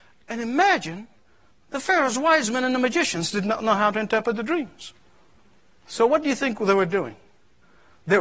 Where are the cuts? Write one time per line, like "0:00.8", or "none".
none